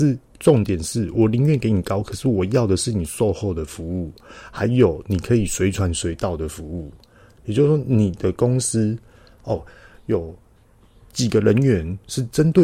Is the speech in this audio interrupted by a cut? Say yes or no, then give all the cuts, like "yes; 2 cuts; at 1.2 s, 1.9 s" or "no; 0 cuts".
no; 0 cuts